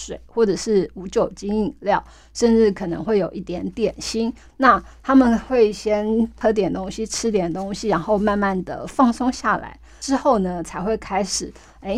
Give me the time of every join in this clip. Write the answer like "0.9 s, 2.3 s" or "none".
4.5 s

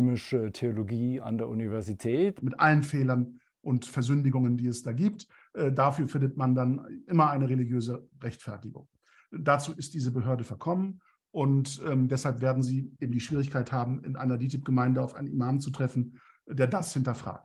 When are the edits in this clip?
2.4 s

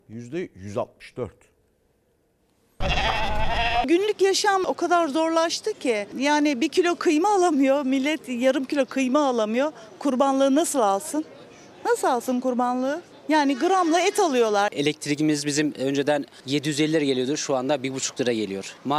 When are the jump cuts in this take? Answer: 14.7 s

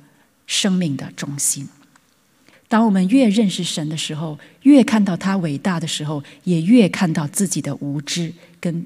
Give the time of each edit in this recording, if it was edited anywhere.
2.5 s

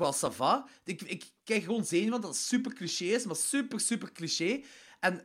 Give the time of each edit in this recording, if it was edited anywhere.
none

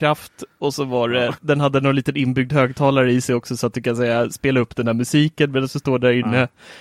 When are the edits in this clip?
1.4 s

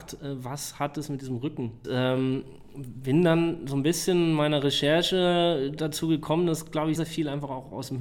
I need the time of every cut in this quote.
1.8 s, 7.0 s

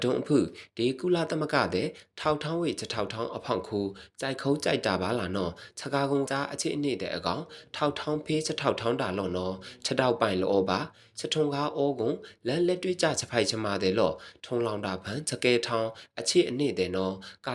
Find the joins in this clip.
6.3 s

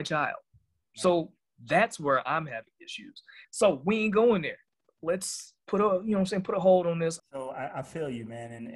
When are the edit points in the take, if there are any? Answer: 3.4 s, 5.6 s, 7.2 s

